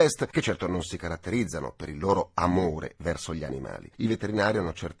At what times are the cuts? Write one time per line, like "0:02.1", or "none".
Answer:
0:03.9